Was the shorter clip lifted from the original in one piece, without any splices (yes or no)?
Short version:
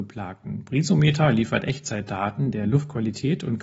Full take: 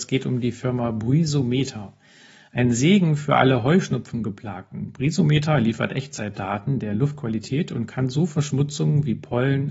yes